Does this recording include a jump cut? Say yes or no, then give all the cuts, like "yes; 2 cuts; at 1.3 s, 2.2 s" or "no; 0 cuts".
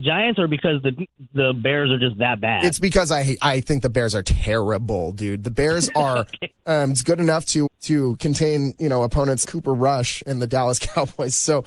yes; 3 cuts; at 6.5 s, 7.7 s, 9.4 s